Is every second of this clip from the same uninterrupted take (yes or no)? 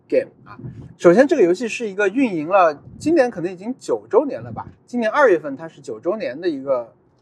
no